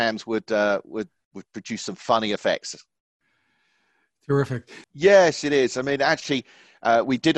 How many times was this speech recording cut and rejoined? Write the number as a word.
one